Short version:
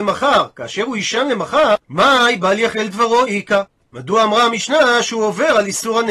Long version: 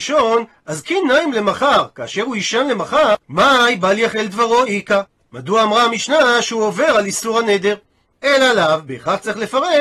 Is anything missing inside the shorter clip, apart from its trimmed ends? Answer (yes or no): no